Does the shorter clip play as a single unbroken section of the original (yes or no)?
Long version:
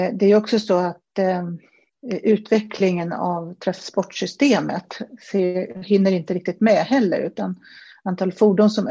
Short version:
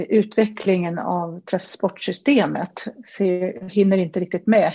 yes